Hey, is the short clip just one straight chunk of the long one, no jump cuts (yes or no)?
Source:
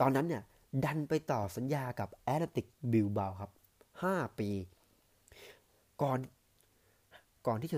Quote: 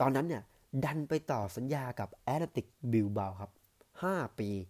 yes